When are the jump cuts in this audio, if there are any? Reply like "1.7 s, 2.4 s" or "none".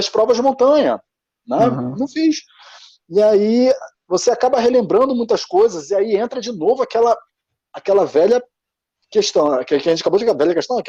none